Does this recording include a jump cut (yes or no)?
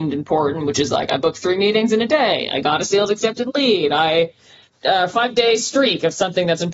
no